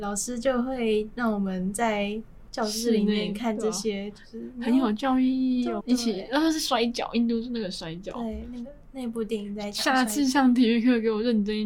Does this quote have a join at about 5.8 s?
yes; 1 cut; at 5.8 s

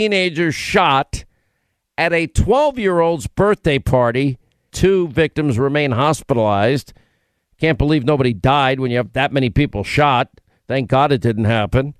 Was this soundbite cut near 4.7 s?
yes; 1 cut; at 4.7 s

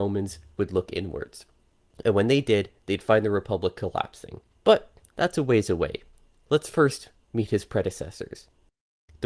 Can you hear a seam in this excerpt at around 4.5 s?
yes; 1 cut; at 4.5 s

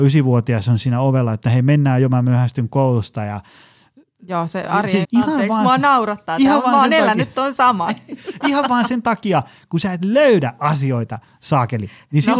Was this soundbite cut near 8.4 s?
no; 1 cut; at 5.0 s

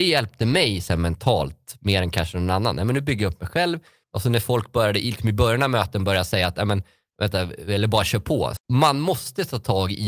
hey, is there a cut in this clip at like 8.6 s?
yes; 2 cuts; at 4.0 s, 8.6 s

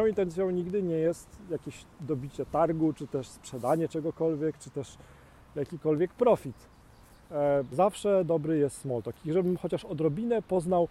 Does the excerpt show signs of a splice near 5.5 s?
no; 1 cut; at 7.7 s

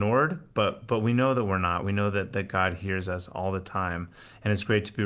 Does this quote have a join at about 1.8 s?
no; 0 cuts

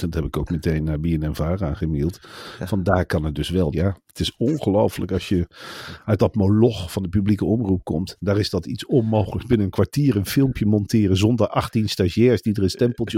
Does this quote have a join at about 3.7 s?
yes; 1 cut; at 3.7 s

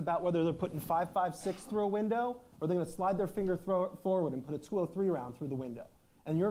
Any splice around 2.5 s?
yes; 1 cut; at 2.5 s

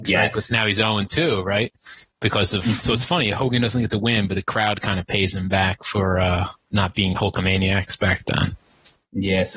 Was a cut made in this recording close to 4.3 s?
no; 1 cut; at 2.8 s

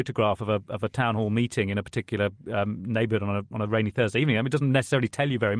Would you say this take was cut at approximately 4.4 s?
no; 0 cuts

